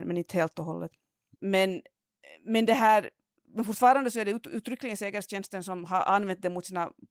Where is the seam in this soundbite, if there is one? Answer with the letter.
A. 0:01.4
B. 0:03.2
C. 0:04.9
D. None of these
A